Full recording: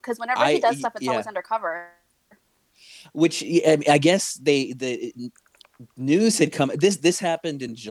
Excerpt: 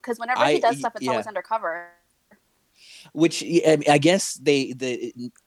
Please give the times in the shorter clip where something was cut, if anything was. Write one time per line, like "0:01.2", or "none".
none